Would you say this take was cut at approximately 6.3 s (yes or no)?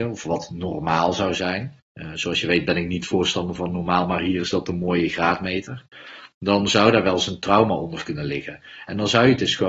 no